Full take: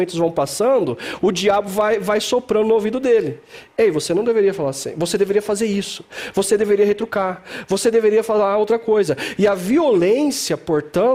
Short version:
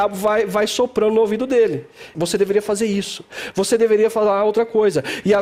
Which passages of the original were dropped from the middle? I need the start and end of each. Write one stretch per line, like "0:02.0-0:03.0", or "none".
0:03.7-0:04.9
0:06.3-0:07.7